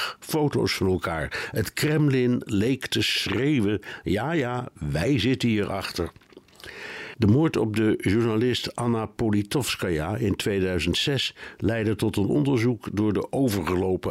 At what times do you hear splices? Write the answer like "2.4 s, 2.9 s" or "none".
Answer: none